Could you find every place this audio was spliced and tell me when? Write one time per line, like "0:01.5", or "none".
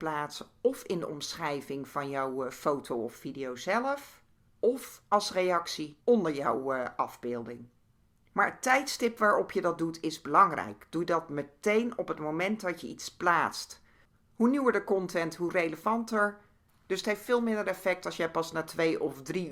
none